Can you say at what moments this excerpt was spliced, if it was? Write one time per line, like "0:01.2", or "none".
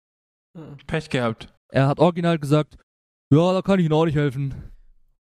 0:01.6